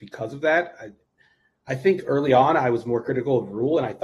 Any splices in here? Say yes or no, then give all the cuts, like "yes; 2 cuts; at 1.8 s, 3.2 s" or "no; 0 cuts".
no; 0 cuts